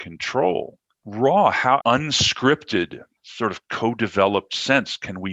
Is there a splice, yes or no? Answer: yes